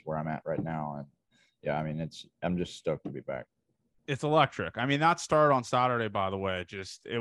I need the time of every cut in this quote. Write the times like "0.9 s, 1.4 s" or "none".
none